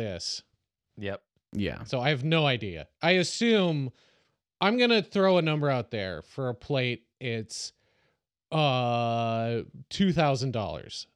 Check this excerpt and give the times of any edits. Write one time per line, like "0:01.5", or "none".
none